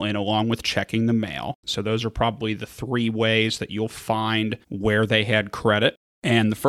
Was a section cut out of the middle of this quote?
yes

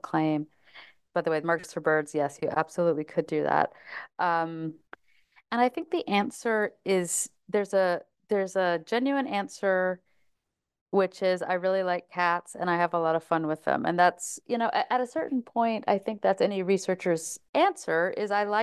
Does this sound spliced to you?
yes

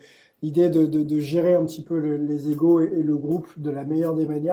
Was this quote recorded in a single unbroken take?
yes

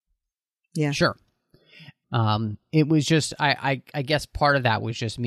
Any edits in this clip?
yes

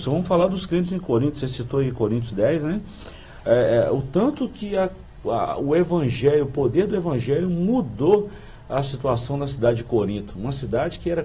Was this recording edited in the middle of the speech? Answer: no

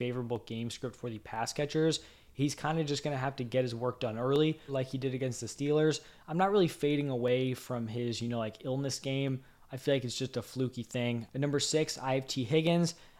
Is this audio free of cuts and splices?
no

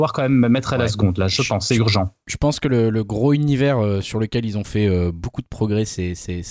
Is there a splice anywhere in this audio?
no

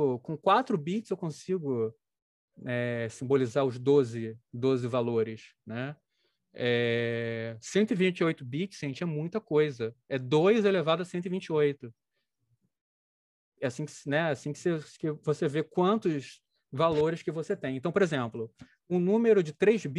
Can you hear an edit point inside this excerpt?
no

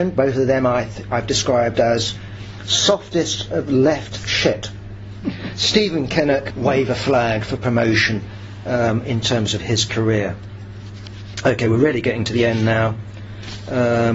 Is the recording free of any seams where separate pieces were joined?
no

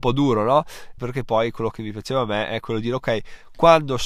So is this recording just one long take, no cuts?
no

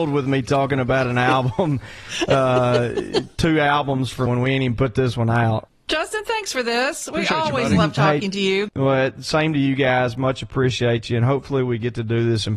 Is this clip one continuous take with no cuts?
no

